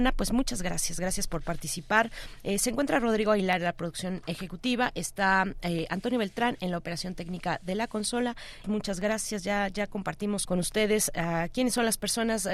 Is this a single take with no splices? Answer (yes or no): no